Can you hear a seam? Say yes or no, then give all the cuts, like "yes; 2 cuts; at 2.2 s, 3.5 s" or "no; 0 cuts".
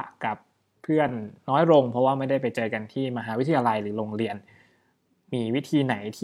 no; 0 cuts